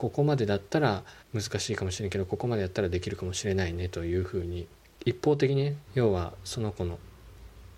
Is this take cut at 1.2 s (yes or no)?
yes